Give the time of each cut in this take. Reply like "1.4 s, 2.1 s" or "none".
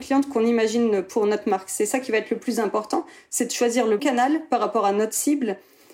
4.0 s